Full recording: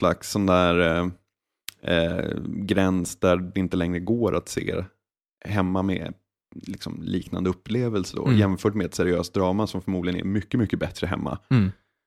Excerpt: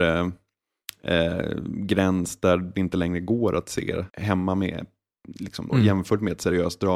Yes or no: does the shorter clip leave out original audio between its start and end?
yes